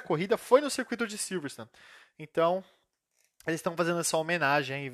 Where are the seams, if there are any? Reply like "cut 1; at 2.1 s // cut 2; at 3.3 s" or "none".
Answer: none